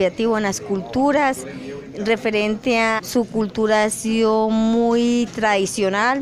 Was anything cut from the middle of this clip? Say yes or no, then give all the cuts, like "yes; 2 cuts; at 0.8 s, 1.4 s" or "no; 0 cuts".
yes; 1 cut; at 3.0 s